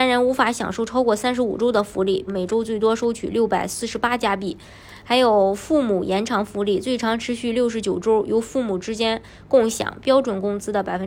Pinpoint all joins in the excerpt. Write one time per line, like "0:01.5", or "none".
0:02.3
0:10.0